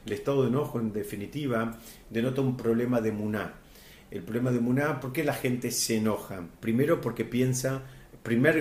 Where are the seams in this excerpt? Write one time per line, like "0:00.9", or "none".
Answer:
0:05.0
0:06.6